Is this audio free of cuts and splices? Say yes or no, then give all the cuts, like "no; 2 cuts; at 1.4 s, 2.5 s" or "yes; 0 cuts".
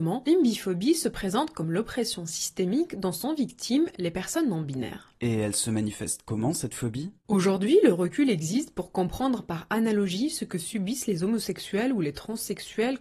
yes; 0 cuts